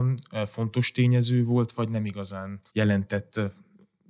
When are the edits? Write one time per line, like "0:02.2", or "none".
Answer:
0:02.7